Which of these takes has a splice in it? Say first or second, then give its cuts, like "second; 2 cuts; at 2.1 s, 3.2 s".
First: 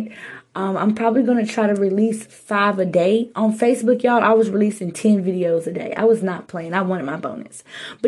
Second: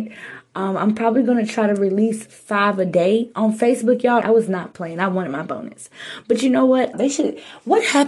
second; 2 cuts; at 4.2 s, 6.9 s